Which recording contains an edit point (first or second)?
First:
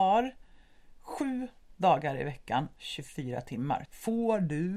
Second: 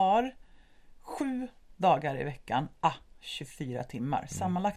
first